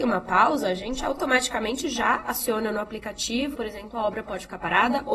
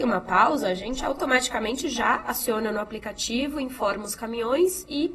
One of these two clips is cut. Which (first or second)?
first